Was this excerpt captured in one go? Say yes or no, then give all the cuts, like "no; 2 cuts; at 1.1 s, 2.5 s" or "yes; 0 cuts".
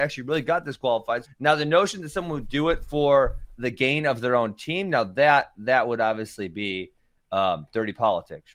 no; 1 cut; at 1.2 s